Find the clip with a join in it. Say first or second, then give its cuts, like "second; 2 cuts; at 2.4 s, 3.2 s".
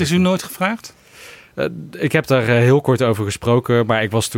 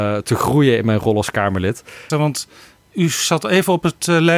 second; 1 cut; at 2.1 s